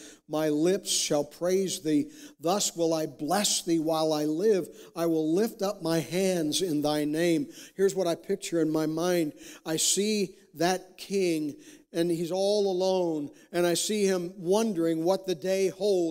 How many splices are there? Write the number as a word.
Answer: zero